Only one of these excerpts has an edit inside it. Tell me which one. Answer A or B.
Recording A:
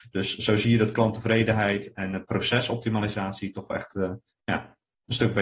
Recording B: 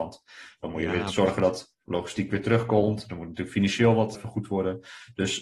B